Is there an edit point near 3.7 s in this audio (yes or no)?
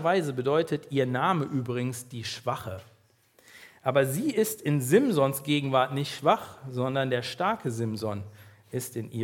no